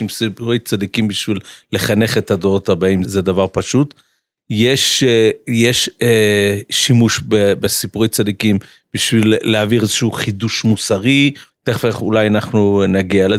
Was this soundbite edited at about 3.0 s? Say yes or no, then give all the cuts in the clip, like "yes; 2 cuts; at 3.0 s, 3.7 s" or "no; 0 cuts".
yes; 2 cuts; at 3.0 s, 11.5 s